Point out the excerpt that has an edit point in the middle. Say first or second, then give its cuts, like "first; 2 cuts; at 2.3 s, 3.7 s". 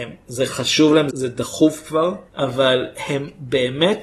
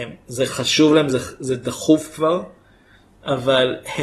first; 2 cuts; at 1.1 s, 2.3 s